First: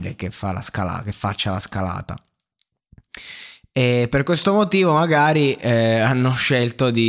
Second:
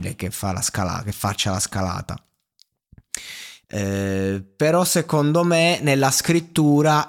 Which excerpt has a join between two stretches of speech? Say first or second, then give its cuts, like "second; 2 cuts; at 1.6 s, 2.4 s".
second; 1 cut; at 3.6 s